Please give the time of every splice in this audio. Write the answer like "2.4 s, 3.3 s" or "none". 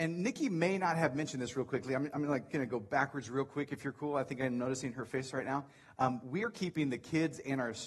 none